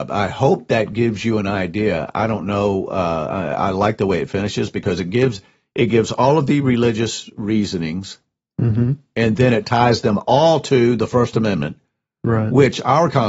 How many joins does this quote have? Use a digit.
0